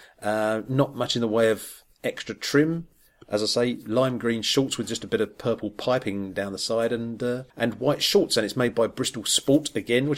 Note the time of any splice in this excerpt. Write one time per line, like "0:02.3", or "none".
0:07.5